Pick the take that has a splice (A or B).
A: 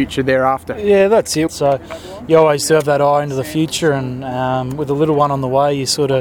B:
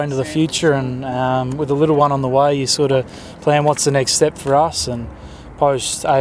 A